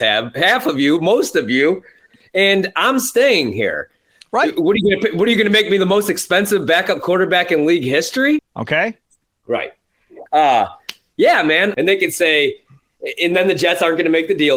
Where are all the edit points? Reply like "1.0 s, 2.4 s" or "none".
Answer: 8.4 s, 10.3 s, 11.7 s